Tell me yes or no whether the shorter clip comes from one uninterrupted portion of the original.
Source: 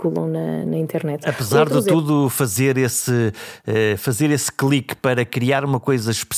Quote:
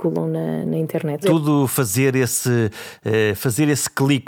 no